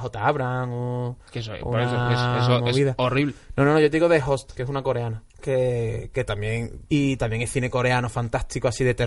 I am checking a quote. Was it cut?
yes; 2 cuts; at 5.3 s, 6.9 s

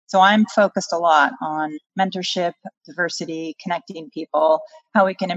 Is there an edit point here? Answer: no; 0 cuts

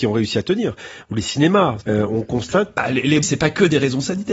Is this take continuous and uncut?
no; 2 cuts; at 1.8 s, 3.2 s

